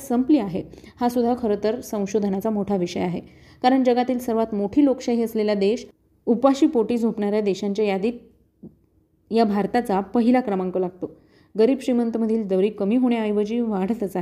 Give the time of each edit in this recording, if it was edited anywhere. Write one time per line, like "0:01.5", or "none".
none